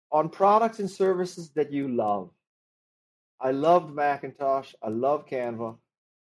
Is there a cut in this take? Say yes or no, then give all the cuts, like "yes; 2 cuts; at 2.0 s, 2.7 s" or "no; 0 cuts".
no; 0 cuts